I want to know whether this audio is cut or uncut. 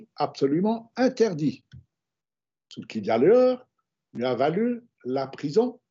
uncut